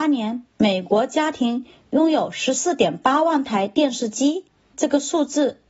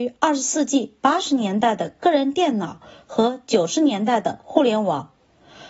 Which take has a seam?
first; 1 cut; at 4.7 s

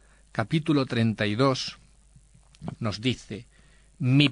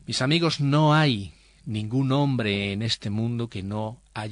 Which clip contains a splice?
first; 1 cut; at 2.7 s

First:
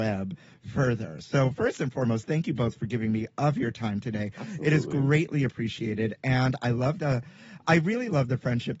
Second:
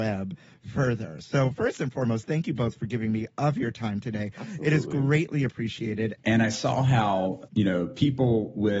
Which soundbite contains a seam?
second; 2 cuts; at 6.2 s, 7.5 s

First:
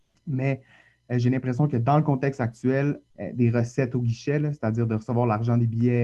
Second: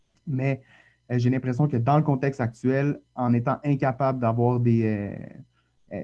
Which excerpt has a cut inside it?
first; 1 cut; at 3.1 s

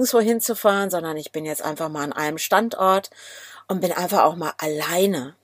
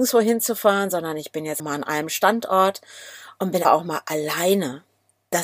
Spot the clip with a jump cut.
second; 2 cuts; at 1.6 s, 3.6 s

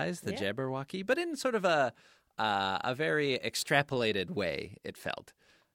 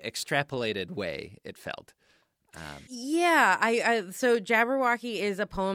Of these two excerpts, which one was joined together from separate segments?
second; 1 cut; at 2.9 s

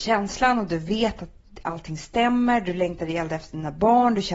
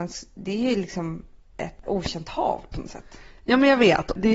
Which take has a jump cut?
second; 1 cut; at 1.8 s

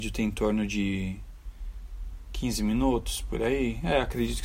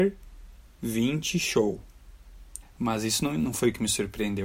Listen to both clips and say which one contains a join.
second; 1 cut; at 2.6 s

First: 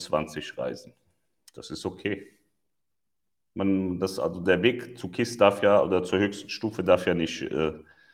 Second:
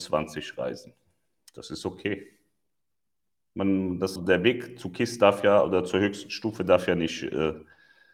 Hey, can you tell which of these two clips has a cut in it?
second; 1 cut; at 4.2 s

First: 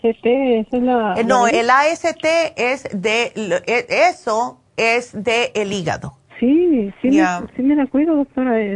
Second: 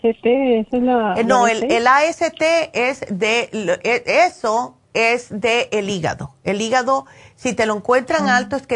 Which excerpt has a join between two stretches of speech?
first; 2 cuts; at 1.5 s, 6.2 s

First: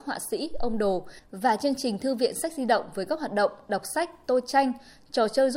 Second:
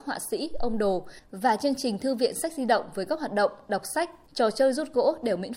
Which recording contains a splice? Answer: second; 1 cut; at 4.3 s

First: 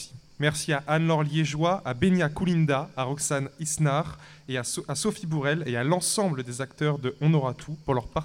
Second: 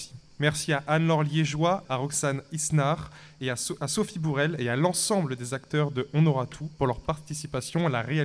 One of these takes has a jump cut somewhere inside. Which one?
second; 1 cut; at 1.8 s

